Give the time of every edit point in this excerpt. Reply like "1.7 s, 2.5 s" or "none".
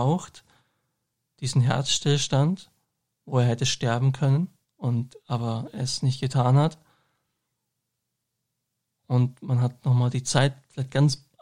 none